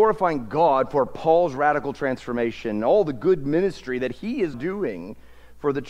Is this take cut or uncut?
cut